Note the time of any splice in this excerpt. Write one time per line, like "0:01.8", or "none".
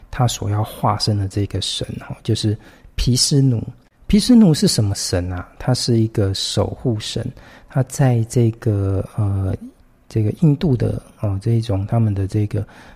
none